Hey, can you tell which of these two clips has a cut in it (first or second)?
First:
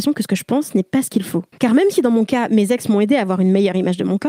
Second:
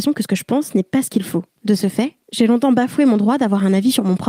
first